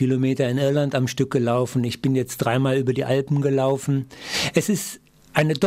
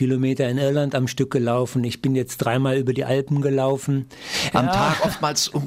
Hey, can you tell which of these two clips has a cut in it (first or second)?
second